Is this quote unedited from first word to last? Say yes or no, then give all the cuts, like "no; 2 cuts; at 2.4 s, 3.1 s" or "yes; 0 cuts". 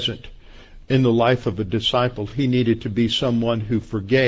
yes; 0 cuts